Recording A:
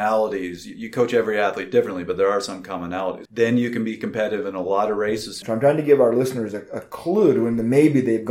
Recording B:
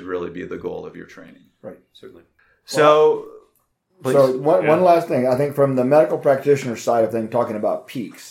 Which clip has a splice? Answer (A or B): A